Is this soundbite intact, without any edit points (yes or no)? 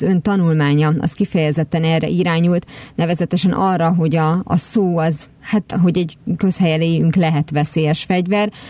yes